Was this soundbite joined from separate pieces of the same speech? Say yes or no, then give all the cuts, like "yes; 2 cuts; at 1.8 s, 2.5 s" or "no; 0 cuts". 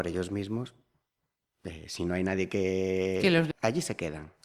yes; 1 cut; at 3.5 s